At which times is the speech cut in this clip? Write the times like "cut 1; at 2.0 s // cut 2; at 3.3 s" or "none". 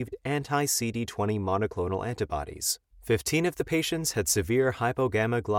cut 1; at 2.9 s